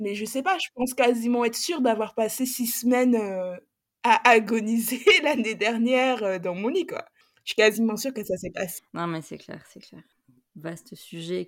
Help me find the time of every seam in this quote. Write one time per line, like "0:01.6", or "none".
0:08.8